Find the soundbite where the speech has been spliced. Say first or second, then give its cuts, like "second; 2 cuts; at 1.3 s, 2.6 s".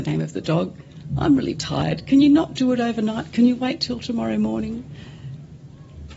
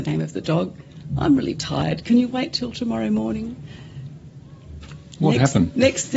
second; 1 cut; at 2.0 s